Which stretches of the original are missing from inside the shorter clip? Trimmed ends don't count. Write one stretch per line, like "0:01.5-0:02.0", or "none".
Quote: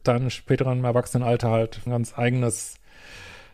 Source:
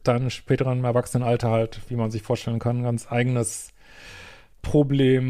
0:01.9-0:02.8